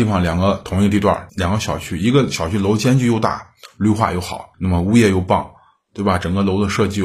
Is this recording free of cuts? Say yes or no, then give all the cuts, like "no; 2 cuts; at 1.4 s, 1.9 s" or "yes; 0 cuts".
no; 2 cuts; at 1.3 s, 4.5 s